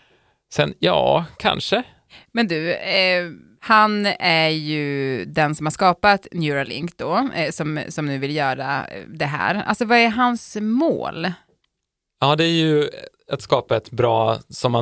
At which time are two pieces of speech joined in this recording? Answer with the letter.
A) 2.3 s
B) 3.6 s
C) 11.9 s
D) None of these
B